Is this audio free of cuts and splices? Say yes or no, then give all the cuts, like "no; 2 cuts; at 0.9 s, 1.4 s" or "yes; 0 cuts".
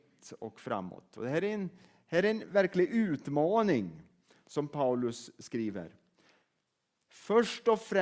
yes; 0 cuts